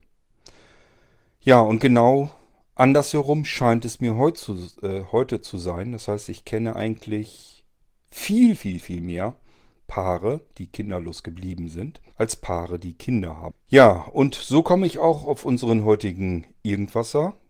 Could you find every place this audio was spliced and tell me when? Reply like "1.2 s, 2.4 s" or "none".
8.6 s, 12.1 s, 13.5 s